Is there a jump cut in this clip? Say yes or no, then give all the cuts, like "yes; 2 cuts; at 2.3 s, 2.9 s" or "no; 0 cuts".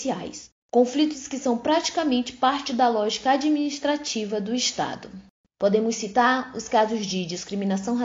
yes; 1 cut; at 5.5 s